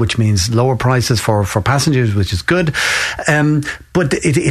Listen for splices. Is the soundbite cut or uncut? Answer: uncut